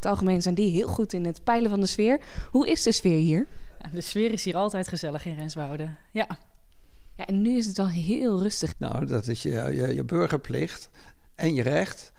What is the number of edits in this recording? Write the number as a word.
two